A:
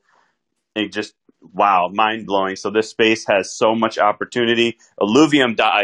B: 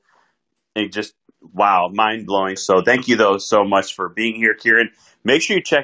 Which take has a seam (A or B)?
B